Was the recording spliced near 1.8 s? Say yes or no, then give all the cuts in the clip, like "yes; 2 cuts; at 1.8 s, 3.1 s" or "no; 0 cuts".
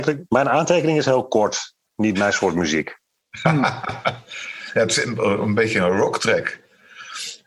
no; 0 cuts